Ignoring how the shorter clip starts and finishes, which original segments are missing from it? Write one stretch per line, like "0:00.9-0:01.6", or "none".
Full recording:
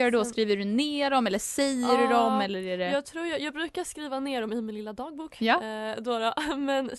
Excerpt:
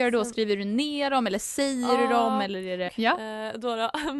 0:02.9-0:05.3